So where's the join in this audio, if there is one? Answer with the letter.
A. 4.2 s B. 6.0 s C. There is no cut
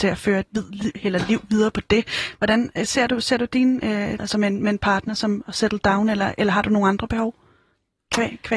A